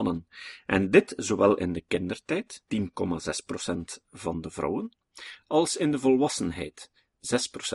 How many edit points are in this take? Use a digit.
1